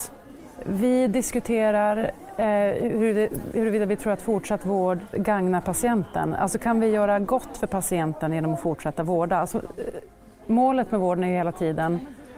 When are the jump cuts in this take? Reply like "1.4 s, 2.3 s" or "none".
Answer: none